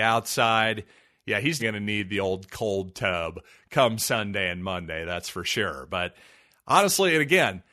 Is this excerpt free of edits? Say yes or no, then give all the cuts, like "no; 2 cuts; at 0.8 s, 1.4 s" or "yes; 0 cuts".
no; 1 cut; at 1.6 s